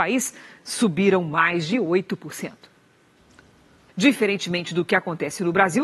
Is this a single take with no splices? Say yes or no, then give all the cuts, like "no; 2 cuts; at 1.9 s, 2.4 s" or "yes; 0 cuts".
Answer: no; 1 cut; at 3.9 s